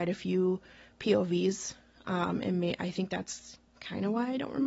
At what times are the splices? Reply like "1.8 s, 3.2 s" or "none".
none